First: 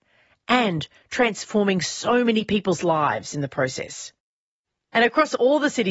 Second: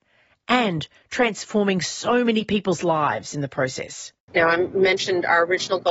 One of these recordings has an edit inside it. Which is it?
second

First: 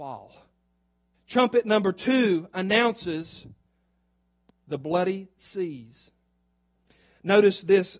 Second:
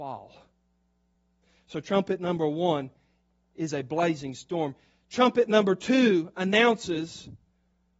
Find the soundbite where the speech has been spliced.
first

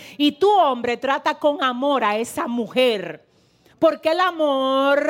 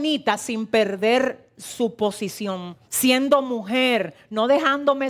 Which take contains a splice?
second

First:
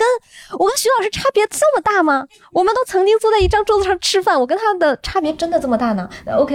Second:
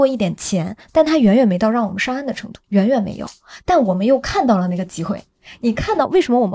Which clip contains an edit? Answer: second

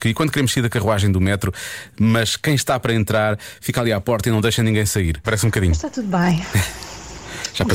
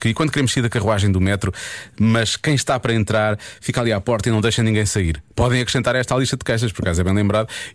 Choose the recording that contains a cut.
first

